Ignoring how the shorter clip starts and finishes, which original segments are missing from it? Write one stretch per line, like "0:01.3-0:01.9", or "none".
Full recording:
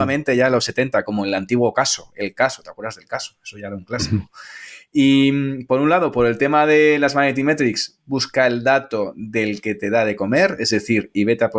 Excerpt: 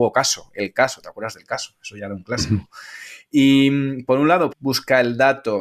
0:06.1-0:08.0